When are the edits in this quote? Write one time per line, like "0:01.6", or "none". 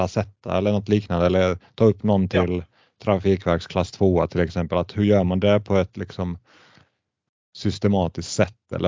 none